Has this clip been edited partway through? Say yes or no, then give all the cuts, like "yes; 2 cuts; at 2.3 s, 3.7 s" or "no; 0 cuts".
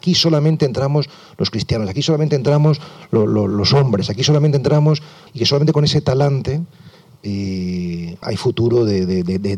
yes; 2 cuts; at 5.3 s, 8.2 s